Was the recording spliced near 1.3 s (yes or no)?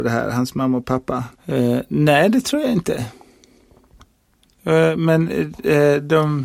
yes